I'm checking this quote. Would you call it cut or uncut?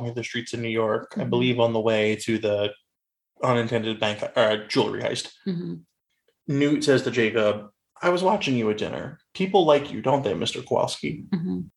uncut